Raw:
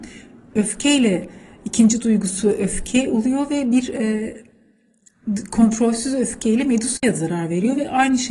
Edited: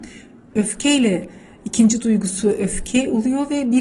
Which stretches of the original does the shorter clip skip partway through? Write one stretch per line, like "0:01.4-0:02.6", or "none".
none